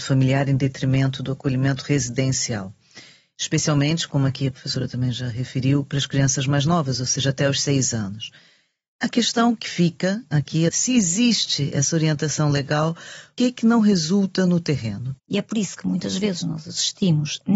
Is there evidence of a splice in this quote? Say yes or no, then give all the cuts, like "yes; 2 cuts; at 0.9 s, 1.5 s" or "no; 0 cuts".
yes; 3 cuts; at 10.7 s, 13.4 s, 15.2 s